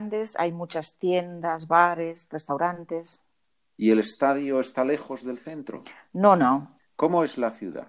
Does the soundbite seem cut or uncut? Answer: cut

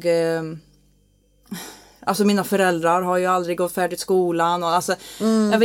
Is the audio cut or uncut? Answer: uncut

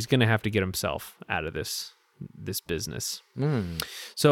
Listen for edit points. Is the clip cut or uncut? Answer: cut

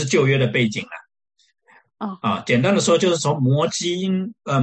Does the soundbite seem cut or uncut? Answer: uncut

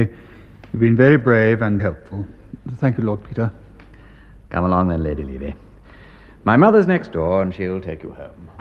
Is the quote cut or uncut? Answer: cut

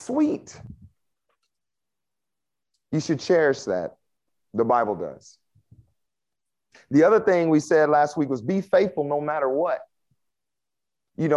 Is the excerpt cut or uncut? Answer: uncut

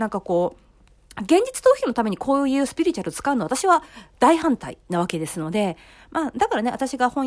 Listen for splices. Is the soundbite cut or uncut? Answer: uncut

